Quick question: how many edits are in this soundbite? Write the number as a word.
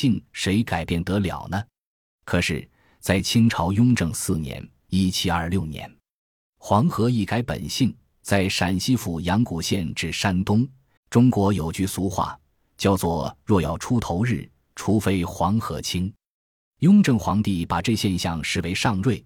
two